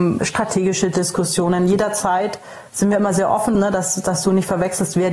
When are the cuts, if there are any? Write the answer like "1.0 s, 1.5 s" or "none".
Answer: 3.5 s

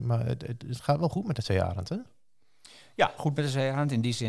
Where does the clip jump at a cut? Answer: 3.2 s

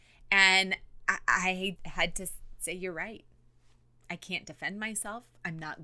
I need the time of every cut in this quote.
1.8 s

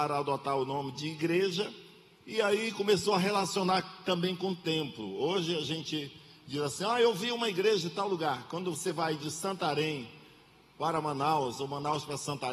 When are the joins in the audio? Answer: none

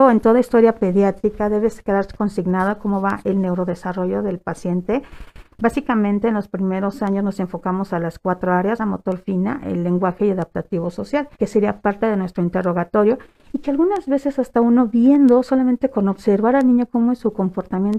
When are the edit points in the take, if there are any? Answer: 8.8 s, 11.3 s

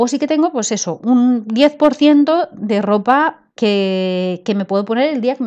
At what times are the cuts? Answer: none

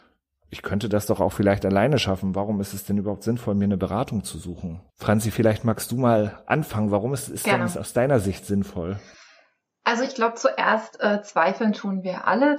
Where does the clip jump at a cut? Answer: 4.9 s

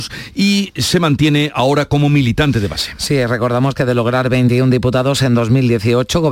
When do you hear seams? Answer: none

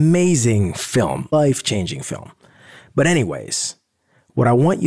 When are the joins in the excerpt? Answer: 1.3 s

